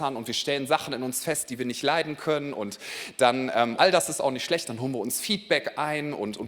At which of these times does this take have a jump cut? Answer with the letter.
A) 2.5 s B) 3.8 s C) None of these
B